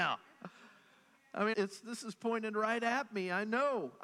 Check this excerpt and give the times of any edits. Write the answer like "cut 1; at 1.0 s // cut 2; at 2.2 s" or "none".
cut 1; at 1.5 s